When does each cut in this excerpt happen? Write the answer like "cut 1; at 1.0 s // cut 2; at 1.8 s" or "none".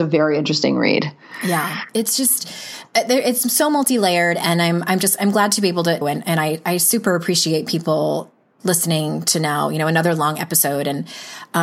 cut 1; at 6.0 s